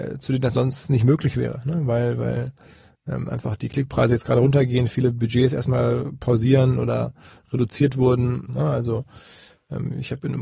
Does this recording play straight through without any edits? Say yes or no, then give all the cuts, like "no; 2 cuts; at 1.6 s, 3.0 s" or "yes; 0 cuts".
no; 1 cut; at 8.5 s